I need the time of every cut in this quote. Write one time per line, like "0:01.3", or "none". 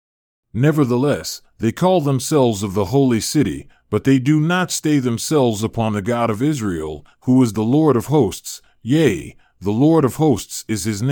none